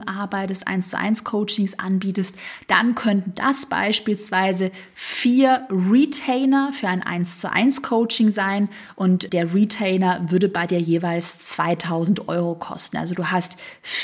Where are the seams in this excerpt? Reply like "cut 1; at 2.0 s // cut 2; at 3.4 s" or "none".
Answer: cut 1; at 9.3 s